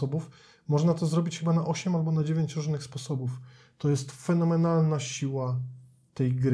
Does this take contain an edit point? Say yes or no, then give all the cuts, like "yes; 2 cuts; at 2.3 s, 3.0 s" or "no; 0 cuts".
no; 0 cuts